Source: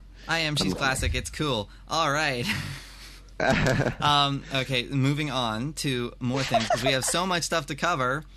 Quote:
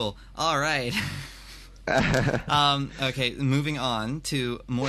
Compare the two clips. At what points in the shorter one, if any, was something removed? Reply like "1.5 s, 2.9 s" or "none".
none